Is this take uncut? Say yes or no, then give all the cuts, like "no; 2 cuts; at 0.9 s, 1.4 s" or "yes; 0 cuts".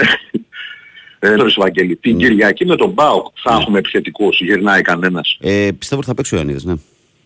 no; 1 cut; at 1.4 s